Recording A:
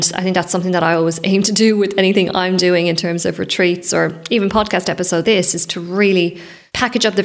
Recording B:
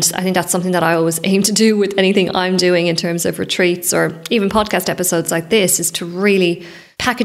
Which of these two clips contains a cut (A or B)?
A